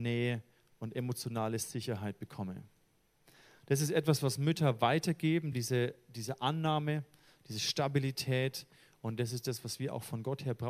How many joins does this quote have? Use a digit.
0